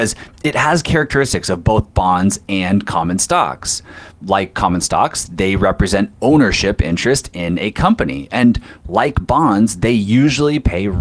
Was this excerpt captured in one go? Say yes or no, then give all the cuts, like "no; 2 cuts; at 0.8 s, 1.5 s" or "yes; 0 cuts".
yes; 0 cuts